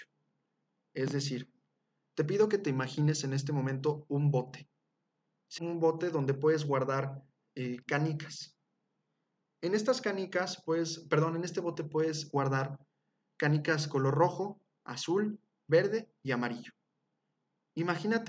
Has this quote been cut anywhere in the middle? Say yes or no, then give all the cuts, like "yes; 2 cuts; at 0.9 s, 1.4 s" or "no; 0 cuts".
yes; 1 cut; at 5.6 s